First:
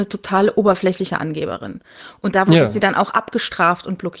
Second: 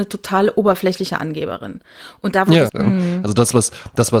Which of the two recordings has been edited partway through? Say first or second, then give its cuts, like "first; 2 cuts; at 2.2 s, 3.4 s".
second; 1 cut; at 2.7 s